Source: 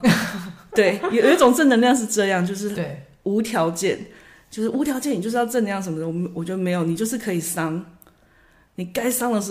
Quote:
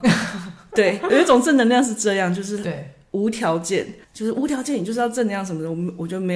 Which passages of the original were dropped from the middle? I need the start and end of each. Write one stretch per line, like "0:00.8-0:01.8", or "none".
0:01.1-0:01.2
0:04.2-0:04.4